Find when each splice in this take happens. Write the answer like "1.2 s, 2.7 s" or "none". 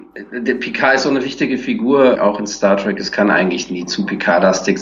2.2 s

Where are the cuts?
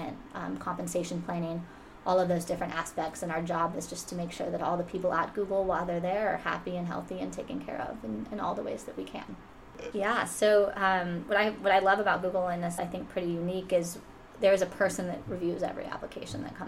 9.9 s, 12.8 s

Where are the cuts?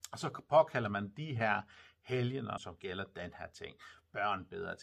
2.6 s

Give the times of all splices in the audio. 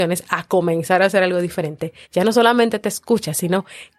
2.0 s

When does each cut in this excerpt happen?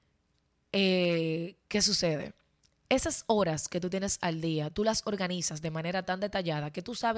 none

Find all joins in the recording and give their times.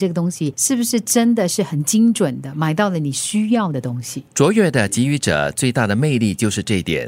4.3 s

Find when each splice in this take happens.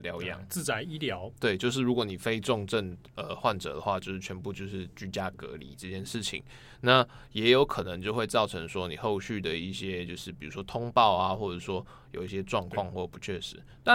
none

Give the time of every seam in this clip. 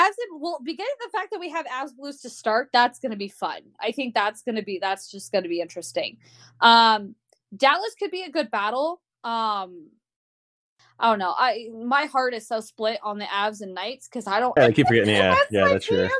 10.8 s, 14.6 s

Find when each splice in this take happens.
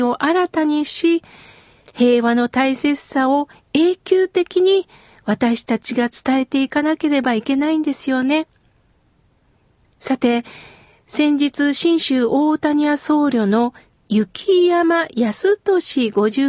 none

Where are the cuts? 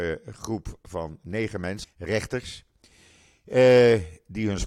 1.8 s

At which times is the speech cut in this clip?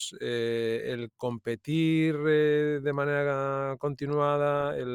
none

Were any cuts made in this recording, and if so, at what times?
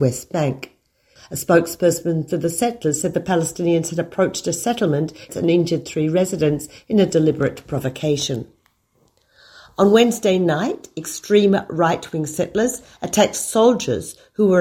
1.2 s, 5.3 s

